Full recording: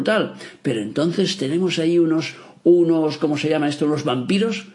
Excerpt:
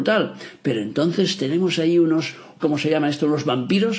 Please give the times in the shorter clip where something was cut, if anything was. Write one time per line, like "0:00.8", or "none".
0:02.6

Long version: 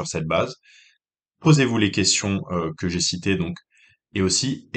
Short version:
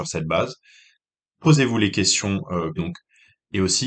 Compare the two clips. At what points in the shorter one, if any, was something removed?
0:02.8

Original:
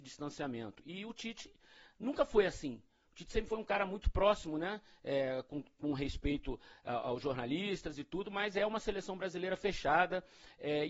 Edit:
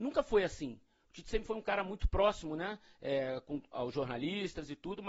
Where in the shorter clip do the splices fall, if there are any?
0:03.7

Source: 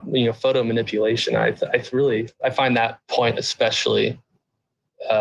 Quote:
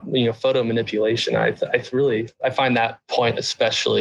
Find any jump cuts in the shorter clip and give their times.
none

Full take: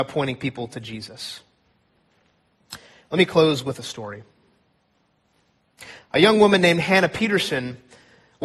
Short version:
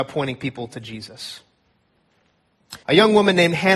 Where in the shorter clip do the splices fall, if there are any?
0:02.8

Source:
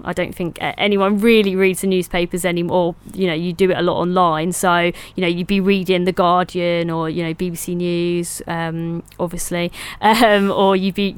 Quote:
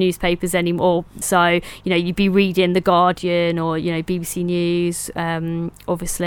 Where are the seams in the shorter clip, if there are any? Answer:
0:01.2

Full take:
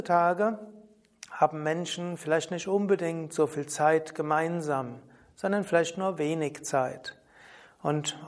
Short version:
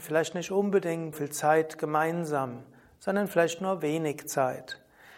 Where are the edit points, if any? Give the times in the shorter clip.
0:01.1

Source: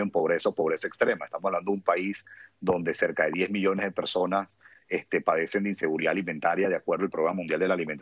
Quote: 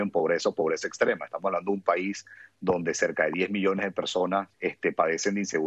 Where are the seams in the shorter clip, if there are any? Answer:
0:04.5

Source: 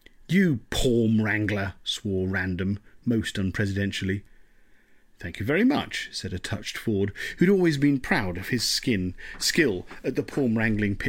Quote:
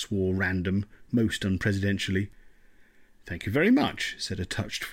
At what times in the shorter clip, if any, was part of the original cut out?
none

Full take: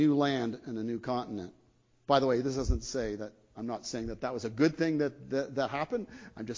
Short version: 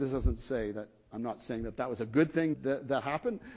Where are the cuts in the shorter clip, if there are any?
0:02.5

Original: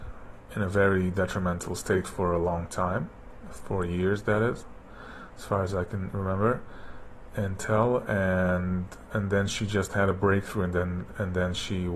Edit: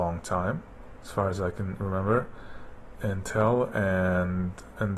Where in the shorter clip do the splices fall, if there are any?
0:01.0

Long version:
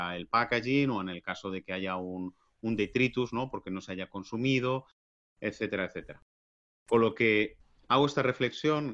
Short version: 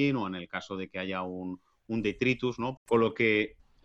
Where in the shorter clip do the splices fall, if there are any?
0:02.8

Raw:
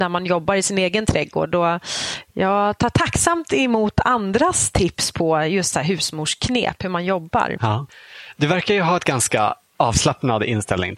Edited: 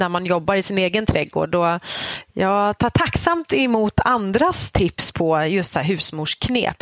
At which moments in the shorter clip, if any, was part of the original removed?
none

